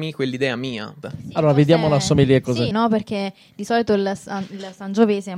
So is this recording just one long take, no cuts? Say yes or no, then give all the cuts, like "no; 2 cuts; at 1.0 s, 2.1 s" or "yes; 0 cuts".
no; 2 cuts; at 1.0 s, 2.7 s